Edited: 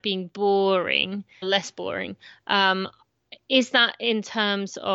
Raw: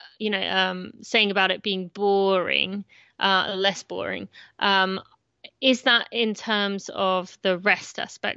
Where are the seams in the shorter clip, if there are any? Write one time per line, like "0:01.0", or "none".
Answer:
0:01.4